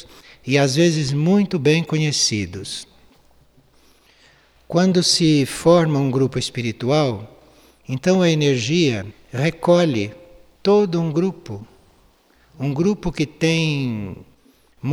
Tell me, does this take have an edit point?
no; 0 cuts

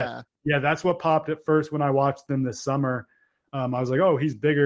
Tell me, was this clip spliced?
no; 0 cuts

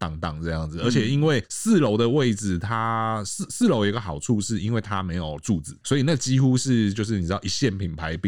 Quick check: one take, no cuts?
yes; 0 cuts

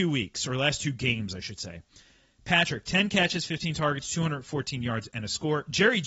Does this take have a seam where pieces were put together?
no; 0 cuts

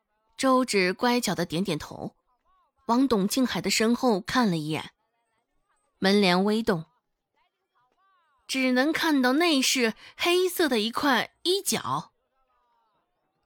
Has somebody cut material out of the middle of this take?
no; 0 cuts

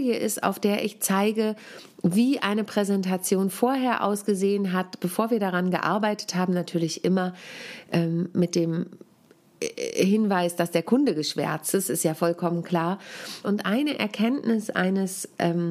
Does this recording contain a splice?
yes; 1 cut; at 13.4 s

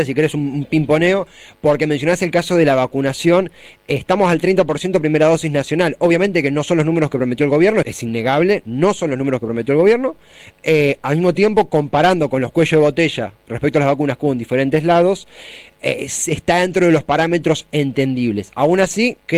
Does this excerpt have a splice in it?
yes; 1 cut; at 7.8 s

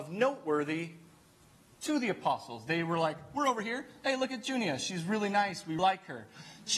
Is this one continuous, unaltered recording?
no; 1 cut; at 5.8 s

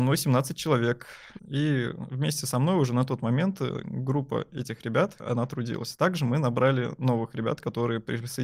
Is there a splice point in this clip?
yes; 2 cuts; at 1.4 s, 5.2 s

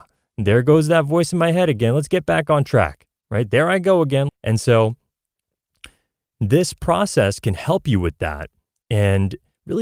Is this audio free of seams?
no; 1 cut; at 4.3 s

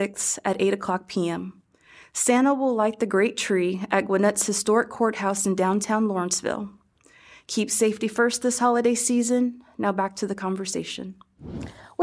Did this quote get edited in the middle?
no; 0 cuts

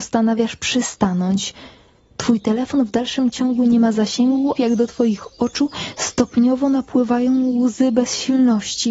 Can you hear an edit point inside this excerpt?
yes; 1 cut; at 4.6 s

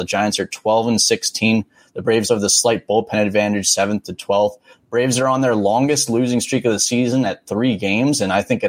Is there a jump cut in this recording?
yes; 1 cut; at 2.3 s

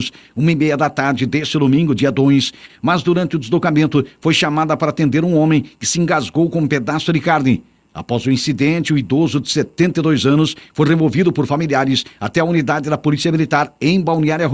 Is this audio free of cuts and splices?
no; 1 cut; at 2.7 s

